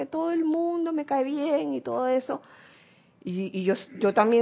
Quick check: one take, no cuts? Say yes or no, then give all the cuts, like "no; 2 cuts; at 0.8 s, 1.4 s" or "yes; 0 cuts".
no; 1 cut; at 3.5 s